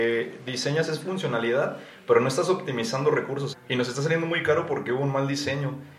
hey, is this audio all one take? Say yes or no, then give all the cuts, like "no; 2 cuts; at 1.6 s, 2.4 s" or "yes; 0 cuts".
no; 1 cut; at 3.5 s